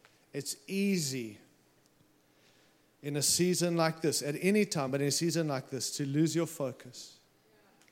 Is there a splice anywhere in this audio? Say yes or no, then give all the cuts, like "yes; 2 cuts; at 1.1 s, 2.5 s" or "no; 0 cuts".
no; 0 cuts